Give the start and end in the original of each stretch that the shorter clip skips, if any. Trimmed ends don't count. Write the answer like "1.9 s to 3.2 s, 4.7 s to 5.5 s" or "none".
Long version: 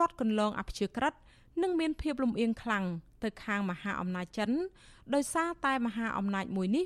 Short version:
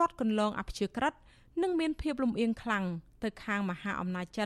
none